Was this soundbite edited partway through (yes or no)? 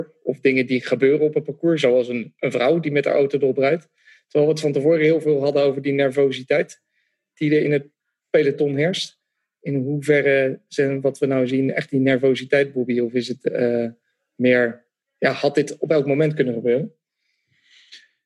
no